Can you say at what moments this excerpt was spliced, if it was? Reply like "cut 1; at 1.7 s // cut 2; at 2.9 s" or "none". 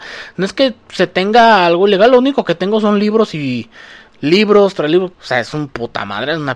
cut 1; at 5.1 s

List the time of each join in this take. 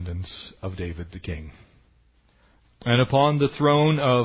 cut 1; at 2.6 s

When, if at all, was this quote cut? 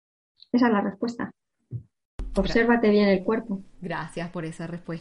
cut 1; at 3.7 s

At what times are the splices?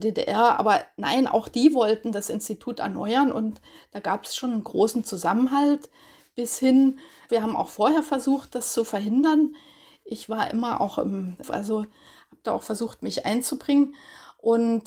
cut 1; at 7.3 s // cut 2; at 11.4 s

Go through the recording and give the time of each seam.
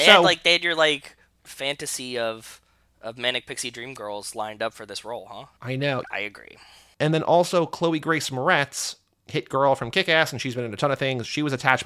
cut 1; at 6.0 s

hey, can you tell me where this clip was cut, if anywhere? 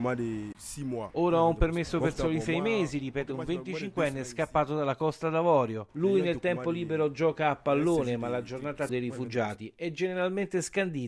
cut 1; at 8.9 s

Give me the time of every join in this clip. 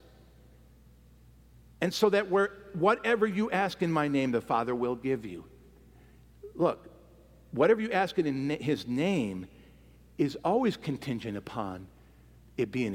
none

